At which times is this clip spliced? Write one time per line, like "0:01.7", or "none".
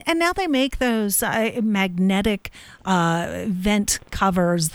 none